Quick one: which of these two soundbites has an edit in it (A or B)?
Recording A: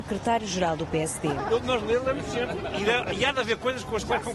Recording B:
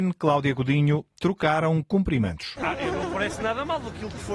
B